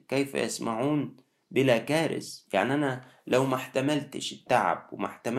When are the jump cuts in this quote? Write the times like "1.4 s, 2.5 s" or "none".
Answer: 2.5 s